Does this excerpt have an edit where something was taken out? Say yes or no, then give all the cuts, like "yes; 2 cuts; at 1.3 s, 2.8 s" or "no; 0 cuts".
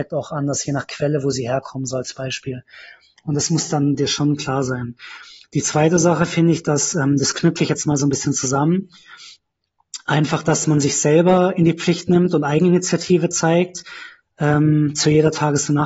no; 0 cuts